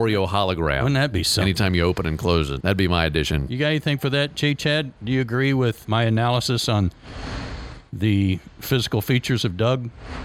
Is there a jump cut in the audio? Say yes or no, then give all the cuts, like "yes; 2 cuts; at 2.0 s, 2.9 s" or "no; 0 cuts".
yes; 2 cuts; at 2.6 s, 5.8 s